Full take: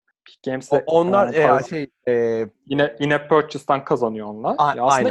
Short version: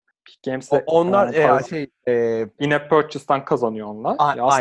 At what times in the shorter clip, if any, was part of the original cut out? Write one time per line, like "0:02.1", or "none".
0:02.6